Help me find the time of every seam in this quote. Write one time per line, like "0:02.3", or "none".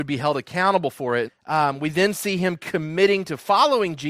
0:01.3